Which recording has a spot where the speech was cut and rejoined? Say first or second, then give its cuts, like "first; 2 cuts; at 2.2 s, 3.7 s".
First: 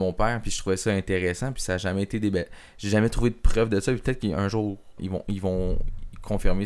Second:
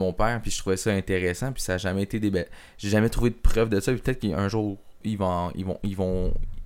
first; 1 cut; at 5.0 s